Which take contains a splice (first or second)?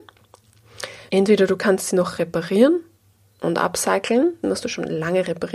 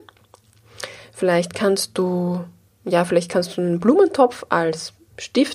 first